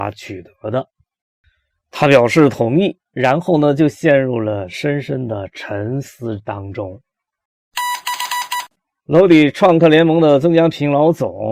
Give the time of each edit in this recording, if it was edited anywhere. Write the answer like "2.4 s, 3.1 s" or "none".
none